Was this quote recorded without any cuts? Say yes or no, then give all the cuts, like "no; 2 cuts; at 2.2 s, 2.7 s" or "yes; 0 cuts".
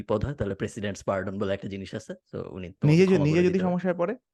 yes; 0 cuts